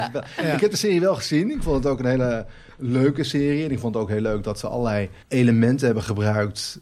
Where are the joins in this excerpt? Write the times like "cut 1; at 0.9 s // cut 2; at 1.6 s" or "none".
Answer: cut 1; at 5.2 s